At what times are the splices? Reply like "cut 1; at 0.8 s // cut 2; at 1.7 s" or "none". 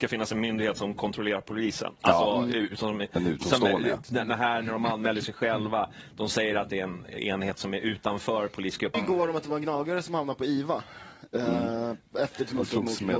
cut 1; at 8.9 s